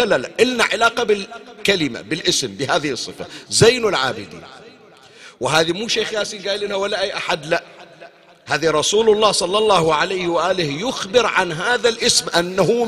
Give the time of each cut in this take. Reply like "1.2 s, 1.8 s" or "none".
none

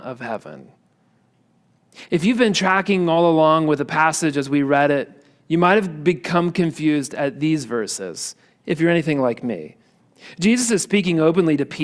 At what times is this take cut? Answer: 2.1 s

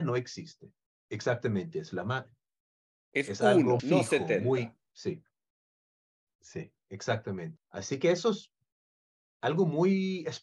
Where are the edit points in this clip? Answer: 3.8 s, 6.3 s, 7.6 s

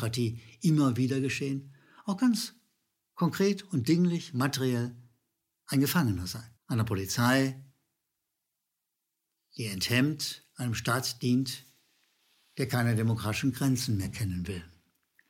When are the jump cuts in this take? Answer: 6.6 s

